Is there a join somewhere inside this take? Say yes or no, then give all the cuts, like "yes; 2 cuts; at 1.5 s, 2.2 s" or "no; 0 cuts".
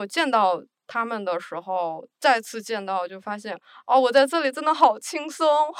no; 0 cuts